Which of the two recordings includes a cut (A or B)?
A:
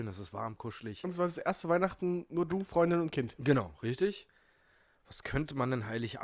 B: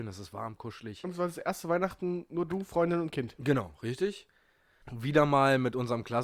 B